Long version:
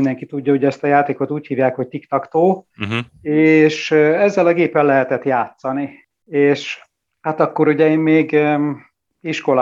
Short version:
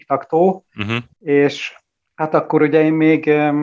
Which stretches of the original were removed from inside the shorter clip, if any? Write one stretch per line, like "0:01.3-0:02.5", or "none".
0:03.1-0:06.2